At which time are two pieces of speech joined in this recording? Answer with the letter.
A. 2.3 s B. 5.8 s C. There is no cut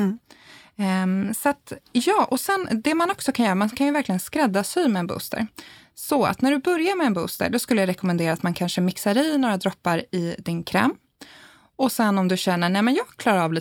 C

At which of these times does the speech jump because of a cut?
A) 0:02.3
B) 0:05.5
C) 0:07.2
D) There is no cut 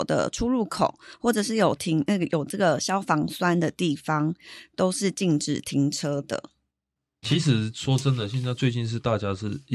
C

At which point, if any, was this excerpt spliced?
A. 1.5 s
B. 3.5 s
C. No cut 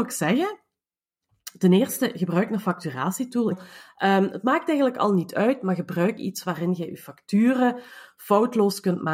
B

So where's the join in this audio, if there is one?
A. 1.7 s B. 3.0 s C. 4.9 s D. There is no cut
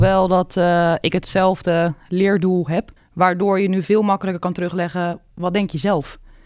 B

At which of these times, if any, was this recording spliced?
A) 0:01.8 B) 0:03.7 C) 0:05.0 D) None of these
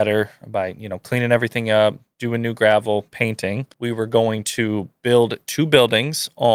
B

